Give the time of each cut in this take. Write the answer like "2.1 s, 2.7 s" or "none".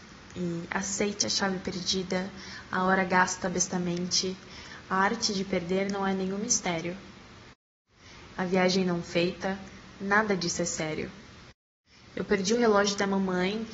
8.3 s